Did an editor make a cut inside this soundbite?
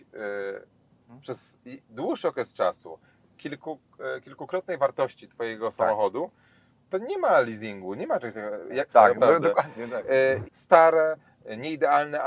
yes; 2 cuts; at 8.9 s, 10.4 s

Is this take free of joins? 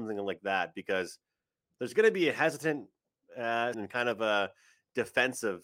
no; 1 cut; at 3.7 s

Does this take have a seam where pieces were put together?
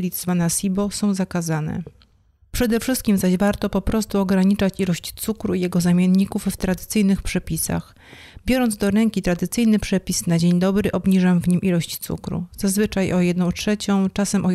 no; 0 cuts

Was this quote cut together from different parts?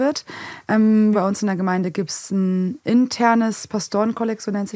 yes; 1 cut; at 1.1 s

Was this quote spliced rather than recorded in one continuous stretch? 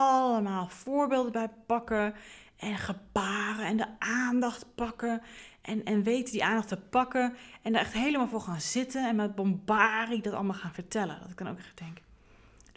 no; 0 cuts

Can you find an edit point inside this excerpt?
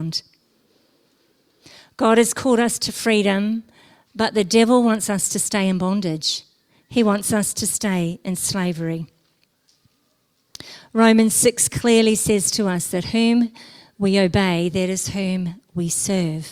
no; 0 cuts

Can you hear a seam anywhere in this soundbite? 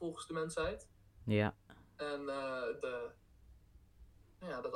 yes; 1 cut; at 2.8 s

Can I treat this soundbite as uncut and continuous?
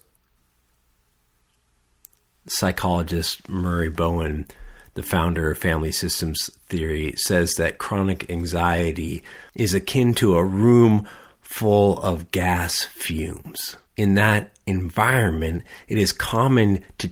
no; 2 cuts; at 9.5 s, 13.9 s

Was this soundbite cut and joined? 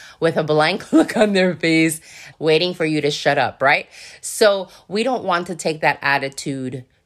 yes; 1 cut; at 2.3 s

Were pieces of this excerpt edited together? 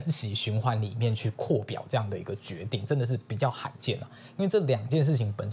no; 0 cuts

